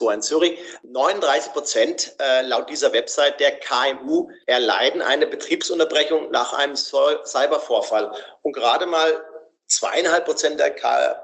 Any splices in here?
no; 0 cuts

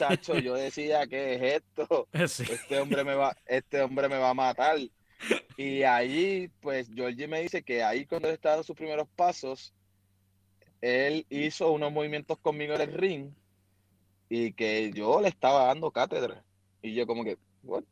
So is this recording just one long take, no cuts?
yes; 0 cuts

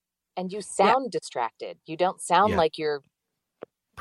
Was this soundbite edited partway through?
no; 0 cuts

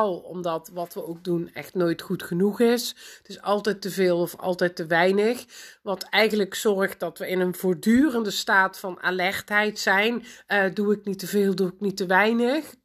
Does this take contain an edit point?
no; 0 cuts

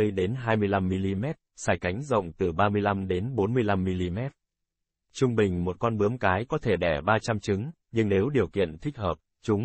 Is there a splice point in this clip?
yes; 1 cut; at 4.9 s

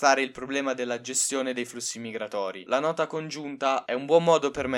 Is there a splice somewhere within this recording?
yes; 2 cuts; at 2.7 s, 3.9 s

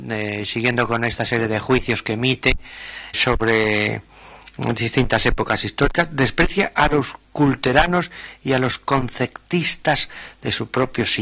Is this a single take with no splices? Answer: no; 1 cut; at 3.1 s

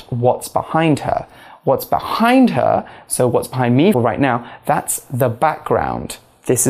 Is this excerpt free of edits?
no; 1 cut; at 3.9 s

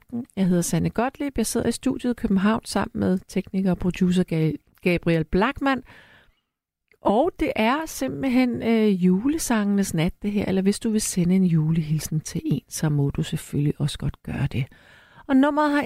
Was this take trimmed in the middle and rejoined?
no; 0 cuts

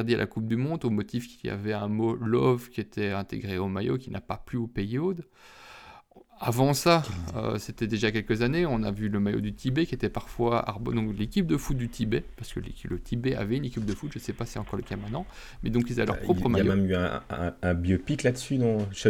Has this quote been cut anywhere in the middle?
no; 0 cuts

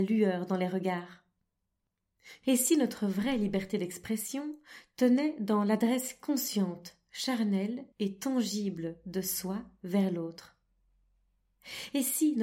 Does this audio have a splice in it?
yes; 2 cuts; at 2.4 s, 7.9 s

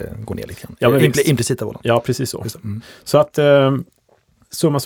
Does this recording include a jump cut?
no; 0 cuts

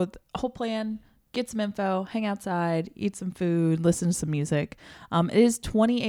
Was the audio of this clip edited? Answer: no; 0 cuts

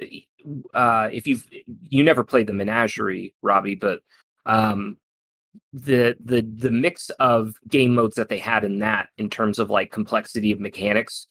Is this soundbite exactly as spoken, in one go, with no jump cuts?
yes; 0 cuts

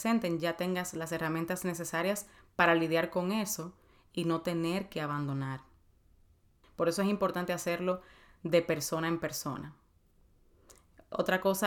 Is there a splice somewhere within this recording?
yes; 1 cut; at 6.6 s

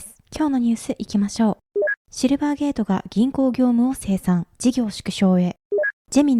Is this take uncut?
no; 1 cut; at 2.0 s

